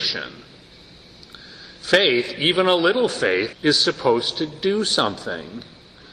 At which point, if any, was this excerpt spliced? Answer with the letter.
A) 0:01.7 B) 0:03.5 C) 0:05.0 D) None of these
B